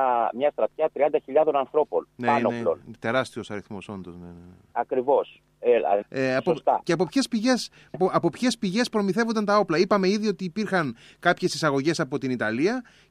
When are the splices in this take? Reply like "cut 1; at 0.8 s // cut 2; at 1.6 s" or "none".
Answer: cut 1; at 6.0 s // cut 2; at 7.9 s